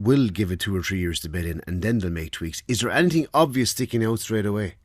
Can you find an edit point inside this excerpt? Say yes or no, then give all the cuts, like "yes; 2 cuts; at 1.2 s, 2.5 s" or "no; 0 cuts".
no; 0 cuts